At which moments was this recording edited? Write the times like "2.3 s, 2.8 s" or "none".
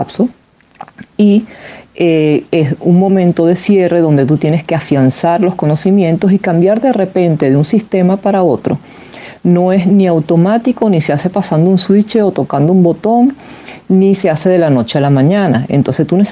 none

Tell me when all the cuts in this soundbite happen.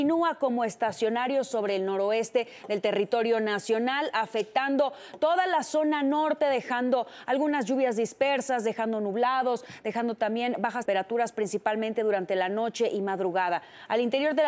10.9 s

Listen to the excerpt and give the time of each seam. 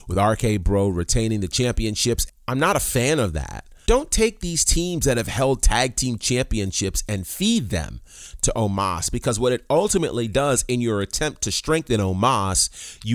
2.3 s, 3.9 s

